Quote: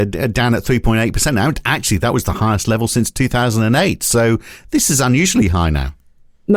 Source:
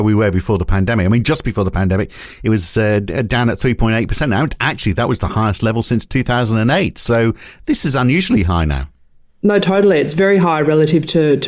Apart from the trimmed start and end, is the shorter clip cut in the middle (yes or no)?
no